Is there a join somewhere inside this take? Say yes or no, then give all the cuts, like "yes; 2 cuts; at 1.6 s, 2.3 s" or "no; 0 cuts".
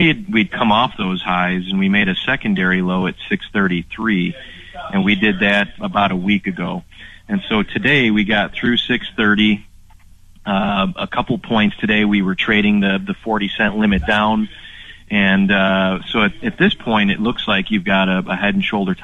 yes; 1 cut; at 5.8 s